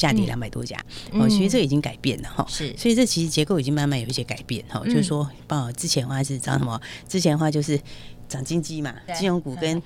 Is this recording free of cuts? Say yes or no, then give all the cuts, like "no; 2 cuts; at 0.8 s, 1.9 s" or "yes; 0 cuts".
yes; 0 cuts